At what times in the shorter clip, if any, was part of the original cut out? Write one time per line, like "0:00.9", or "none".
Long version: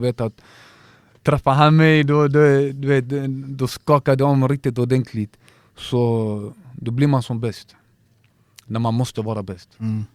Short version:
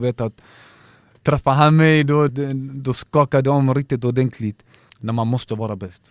0:02.3
0:04.9